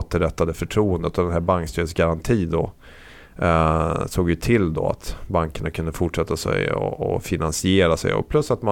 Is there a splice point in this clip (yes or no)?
no